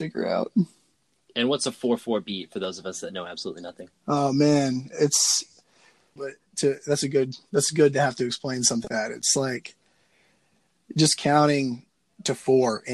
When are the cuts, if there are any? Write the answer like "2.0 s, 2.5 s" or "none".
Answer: 6.2 s, 8.9 s